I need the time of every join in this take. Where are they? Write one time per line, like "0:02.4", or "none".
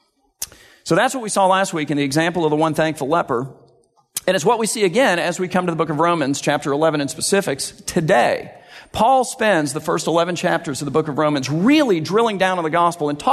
none